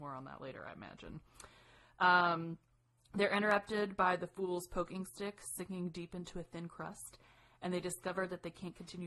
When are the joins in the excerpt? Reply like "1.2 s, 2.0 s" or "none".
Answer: none